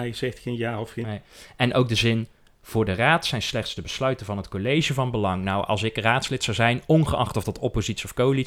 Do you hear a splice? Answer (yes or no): yes